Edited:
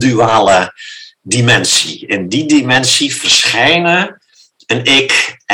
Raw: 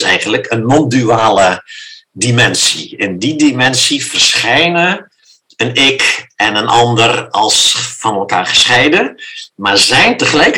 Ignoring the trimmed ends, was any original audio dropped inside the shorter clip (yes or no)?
no